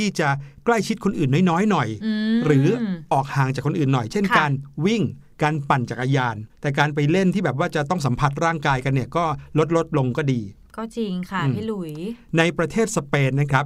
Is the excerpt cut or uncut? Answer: cut